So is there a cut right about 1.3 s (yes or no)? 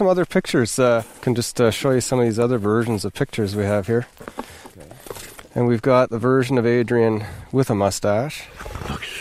no